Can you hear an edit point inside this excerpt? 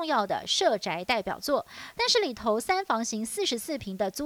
no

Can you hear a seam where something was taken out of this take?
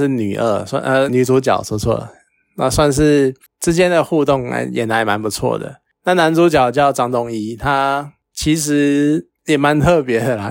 yes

